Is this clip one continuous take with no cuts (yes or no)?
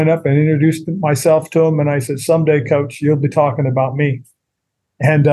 yes